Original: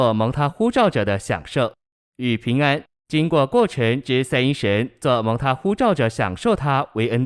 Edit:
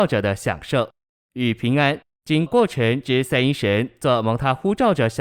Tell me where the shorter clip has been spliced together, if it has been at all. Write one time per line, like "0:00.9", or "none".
0:02.5